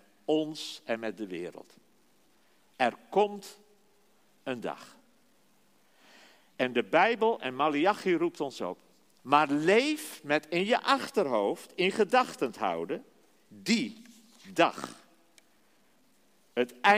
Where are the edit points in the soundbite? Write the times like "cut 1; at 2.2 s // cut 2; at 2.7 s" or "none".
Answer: cut 1; at 9.2 s